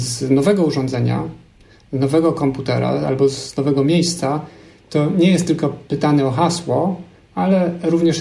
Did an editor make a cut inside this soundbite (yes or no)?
no